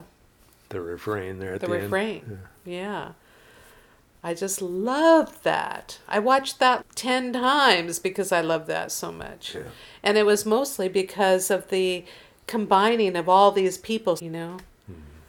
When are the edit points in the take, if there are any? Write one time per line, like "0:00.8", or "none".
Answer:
0:06.8
0:14.2